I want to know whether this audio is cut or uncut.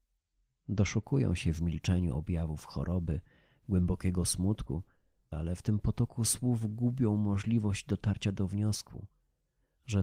cut